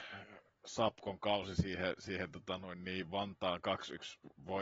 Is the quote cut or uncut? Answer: uncut